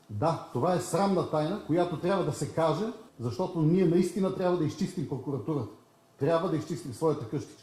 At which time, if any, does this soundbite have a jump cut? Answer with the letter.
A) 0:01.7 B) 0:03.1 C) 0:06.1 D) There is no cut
B